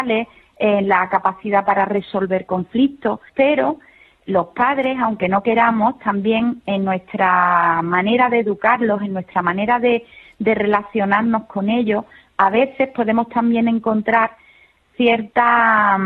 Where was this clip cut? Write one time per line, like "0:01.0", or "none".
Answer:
0:03.3